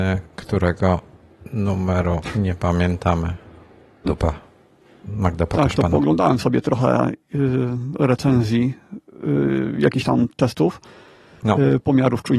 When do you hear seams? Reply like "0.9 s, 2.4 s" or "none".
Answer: 4.1 s